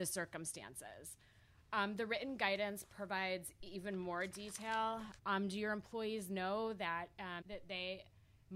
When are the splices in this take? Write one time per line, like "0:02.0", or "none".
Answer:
0:05.2
0:07.4